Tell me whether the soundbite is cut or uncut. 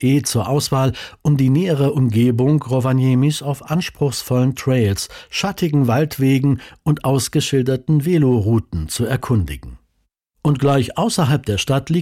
uncut